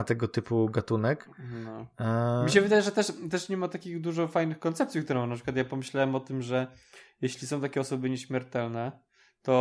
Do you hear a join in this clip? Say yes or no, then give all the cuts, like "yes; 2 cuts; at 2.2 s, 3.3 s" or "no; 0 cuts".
no; 0 cuts